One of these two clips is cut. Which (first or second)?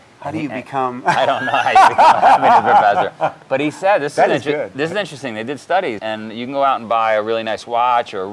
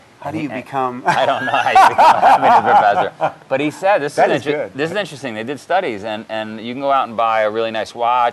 first